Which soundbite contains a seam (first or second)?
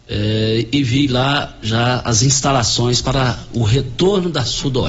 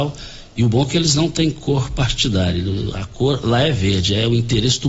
first